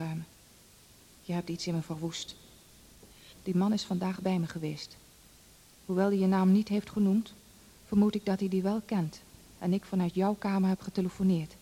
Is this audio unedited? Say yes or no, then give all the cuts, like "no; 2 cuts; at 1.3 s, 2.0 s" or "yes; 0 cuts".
no; 2 cuts; at 3.3 s, 9.5 s